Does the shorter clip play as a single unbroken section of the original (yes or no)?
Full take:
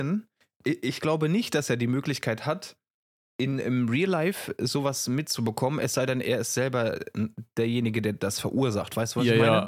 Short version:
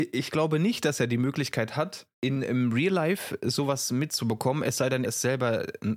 no